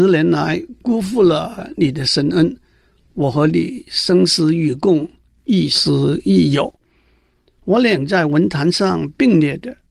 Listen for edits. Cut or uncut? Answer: uncut